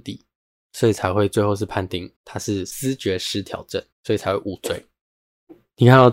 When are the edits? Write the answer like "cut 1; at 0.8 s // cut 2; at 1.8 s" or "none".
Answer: cut 1; at 2.1 s // cut 2; at 3.9 s